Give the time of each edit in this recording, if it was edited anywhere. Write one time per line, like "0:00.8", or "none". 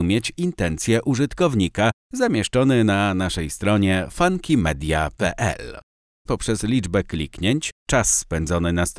0:06.3